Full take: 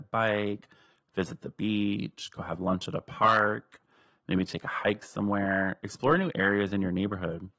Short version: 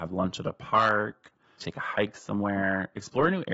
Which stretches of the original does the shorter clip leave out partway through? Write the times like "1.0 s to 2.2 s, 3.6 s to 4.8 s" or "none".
4.1 s to 4.5 s